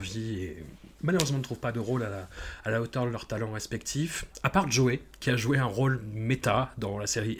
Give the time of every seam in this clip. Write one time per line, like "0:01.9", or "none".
none